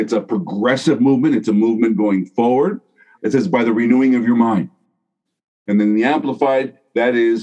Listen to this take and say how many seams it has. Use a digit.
1